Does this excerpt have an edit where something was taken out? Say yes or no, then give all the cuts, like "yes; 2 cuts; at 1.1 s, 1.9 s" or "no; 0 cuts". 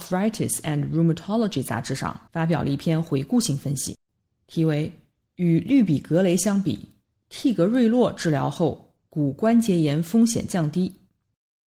yes; 1 cut; at 2.3 s